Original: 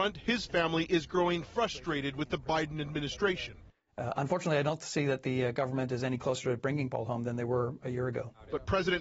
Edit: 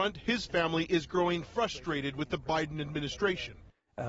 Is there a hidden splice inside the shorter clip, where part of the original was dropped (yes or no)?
no